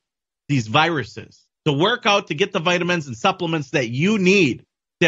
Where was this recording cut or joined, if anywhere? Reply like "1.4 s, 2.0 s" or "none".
1.6 s

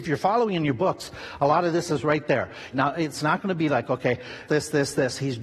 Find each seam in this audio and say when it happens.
2.7 s, 4.5 s

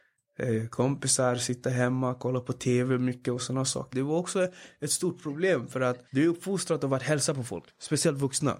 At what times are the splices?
3.9 s, 6.1 s

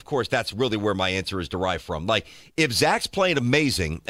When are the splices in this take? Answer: none

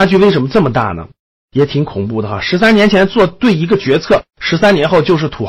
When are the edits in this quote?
1.4 s

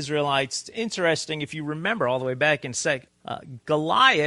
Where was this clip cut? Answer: 3.1 s

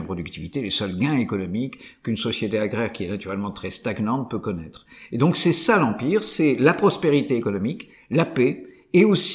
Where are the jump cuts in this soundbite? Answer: none

